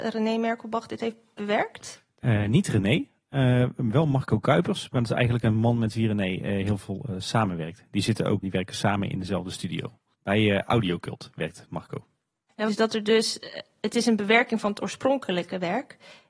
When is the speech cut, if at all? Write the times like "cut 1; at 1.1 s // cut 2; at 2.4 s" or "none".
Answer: cut 1; at 8.4 s // cut 2; at 12.7 s